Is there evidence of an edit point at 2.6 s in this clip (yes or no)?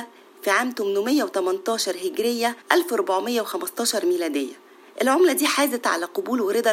yes